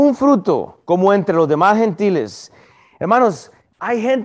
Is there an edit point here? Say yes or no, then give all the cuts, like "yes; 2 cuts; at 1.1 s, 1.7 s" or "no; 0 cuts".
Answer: no; 0 cuts